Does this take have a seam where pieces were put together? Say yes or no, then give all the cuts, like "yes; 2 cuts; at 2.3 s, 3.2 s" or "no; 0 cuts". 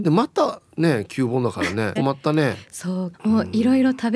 yes; 2 cuts; at 2.0 s, 3.1 s